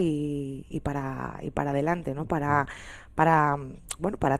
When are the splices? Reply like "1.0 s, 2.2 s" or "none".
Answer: none

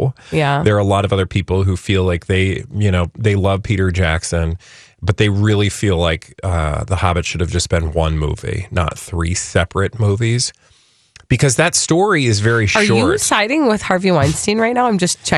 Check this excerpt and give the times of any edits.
none

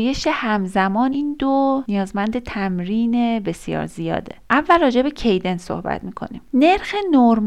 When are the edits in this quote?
1.1 s

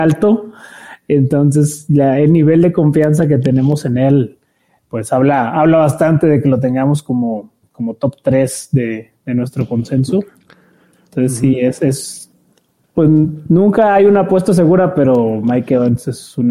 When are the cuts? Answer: none

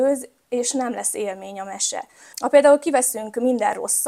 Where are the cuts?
2.3 s

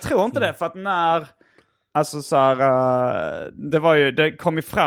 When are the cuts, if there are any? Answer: none

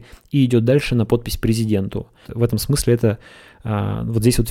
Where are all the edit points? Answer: 2.2 s

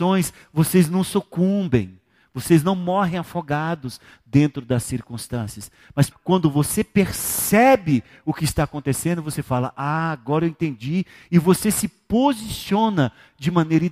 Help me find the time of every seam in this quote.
6.1 s

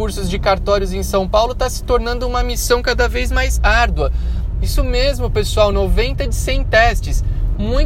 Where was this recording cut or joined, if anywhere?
4.5 s, 5.7 s

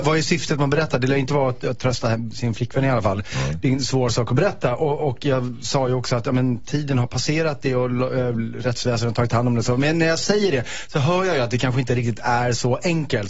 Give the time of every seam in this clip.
none

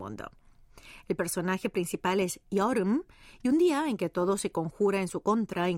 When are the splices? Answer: none

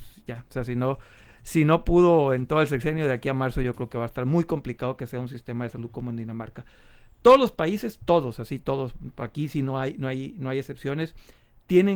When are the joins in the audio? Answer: none

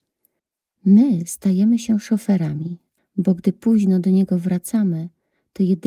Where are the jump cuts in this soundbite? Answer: 3.0 s

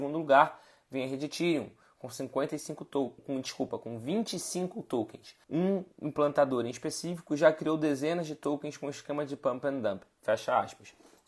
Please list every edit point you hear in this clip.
3.2 s, 5.4 s

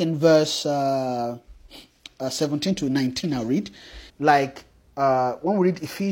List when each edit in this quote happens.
4.1 s

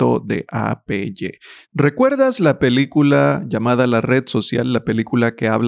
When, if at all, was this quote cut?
1.7 s

